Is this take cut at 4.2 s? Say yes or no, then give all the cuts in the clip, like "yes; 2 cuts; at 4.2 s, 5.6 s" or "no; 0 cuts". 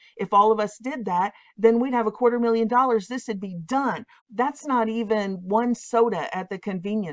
yes; 1 cut; at 4.2 s